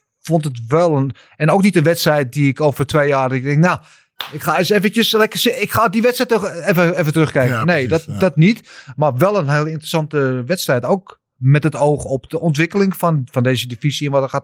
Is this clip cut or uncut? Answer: uncut